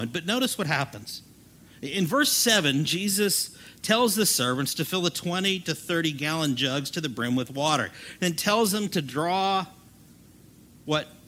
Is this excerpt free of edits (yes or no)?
yes